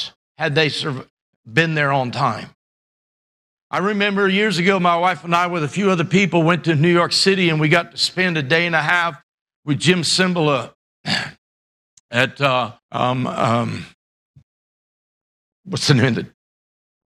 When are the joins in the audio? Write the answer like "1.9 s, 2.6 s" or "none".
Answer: 12.8 s